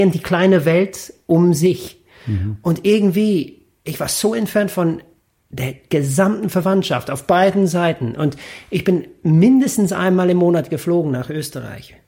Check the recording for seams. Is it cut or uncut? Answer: uncut